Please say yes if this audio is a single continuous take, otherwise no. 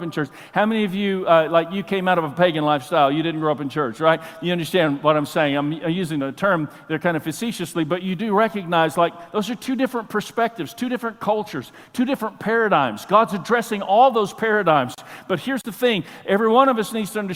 yes